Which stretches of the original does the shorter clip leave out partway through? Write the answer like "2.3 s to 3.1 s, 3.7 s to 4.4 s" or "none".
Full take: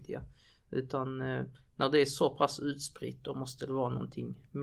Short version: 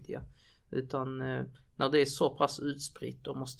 none

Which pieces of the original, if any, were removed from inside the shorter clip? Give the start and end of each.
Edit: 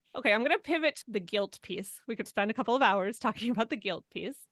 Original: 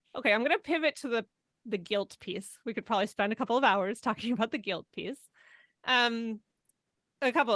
1.0 s to 1.6 s, 2.8 s to 3.1 s

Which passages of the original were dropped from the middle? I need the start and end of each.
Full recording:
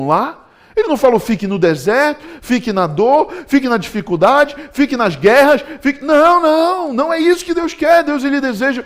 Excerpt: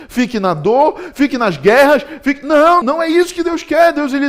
3.5 s to 4.7 s, 6.4 s to 6.9 s

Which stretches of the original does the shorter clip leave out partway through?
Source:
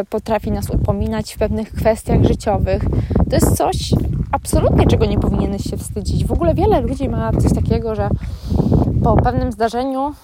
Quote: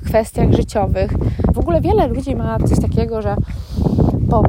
3.3 s to 6.3 s

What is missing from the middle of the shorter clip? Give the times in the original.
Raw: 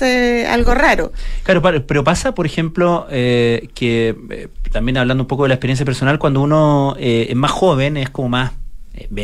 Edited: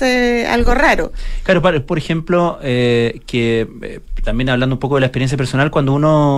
1.9 s to 2.4 s

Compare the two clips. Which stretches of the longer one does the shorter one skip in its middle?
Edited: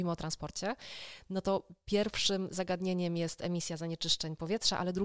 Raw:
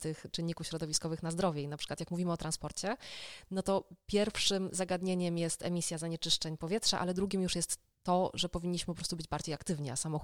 none

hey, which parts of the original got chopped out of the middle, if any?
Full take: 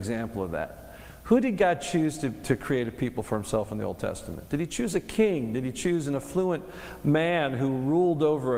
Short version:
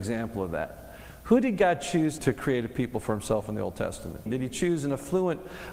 2.2 s to 2.4 s, 4.5 s to 5.5 s

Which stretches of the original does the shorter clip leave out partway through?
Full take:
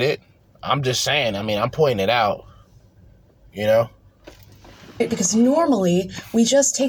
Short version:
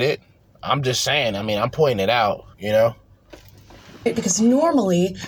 2.5 s to 3.5 s

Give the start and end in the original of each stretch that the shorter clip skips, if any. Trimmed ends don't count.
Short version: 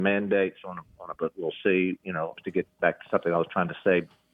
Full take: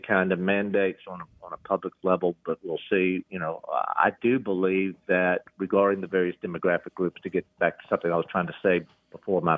1.6 s to 2.4 s, 3.6 s to 7.1 s

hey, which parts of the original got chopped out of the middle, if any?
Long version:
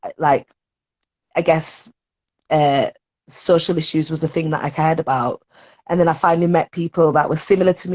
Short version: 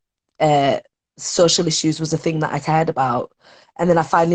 none

